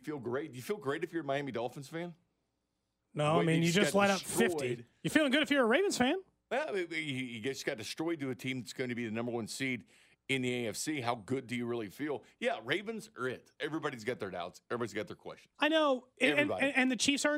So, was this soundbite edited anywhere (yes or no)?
yes